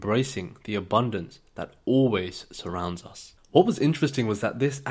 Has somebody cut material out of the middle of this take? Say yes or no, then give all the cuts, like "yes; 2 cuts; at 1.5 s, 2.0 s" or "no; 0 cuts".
no; 0 cuts